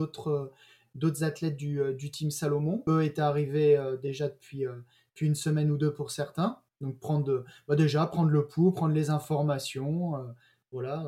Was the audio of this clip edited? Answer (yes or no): yes